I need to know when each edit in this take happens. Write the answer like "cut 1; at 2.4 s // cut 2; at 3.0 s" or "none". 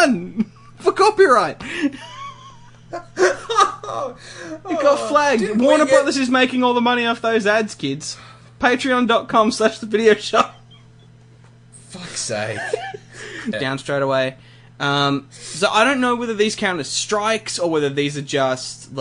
cut 1; at 13.5 s